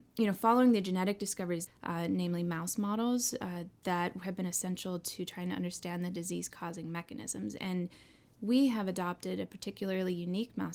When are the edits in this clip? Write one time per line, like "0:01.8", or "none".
0:01.7